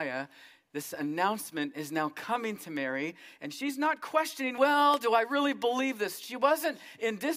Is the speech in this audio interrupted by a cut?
no; 0 cuts

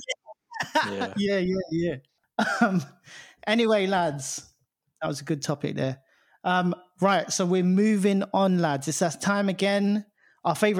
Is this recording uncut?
yes; 0 cuts

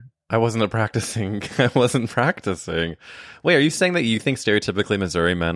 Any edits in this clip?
no; 0 cuts

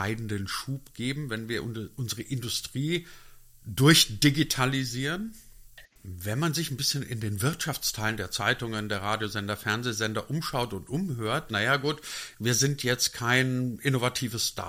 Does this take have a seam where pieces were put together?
yes; 2 cuts; at 5.9 s, 11.5 s

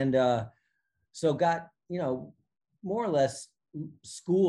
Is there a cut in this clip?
no; 0 cuts

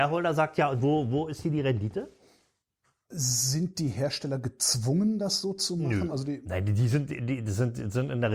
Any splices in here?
yes; 2 cuts; at 3.0 s, 6.1 s

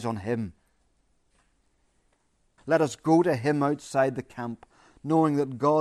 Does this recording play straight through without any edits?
no; 1 cut; at 2.6 s

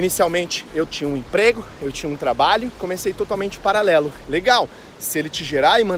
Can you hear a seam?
yes; 1 cut; at 4.2 s

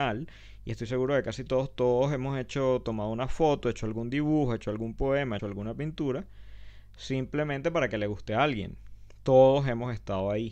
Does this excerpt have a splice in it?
yes; 1 cut; at 5.4 s

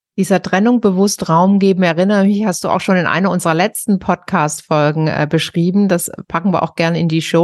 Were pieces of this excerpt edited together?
no; 0 cuts

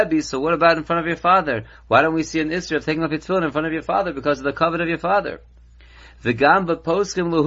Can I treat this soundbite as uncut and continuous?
yes; 0 cuts

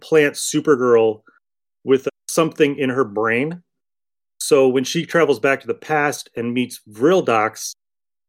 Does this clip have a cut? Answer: yes; 1 cut; at 2.1 s

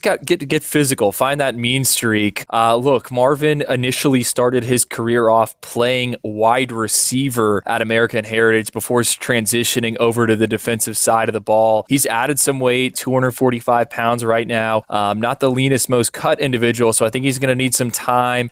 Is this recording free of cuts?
no; 1 cut; at 12.9 s

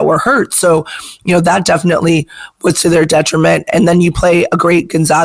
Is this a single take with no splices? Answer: yes; 0 cuts

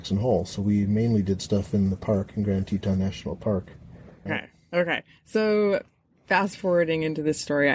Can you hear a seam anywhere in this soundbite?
yes; 1 cut; at 4.3 s

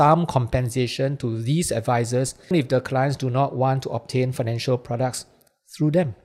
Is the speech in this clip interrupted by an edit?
yes; 1 cut; at 2.5 s

